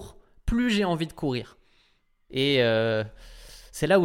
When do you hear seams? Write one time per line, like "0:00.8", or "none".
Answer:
0:02.3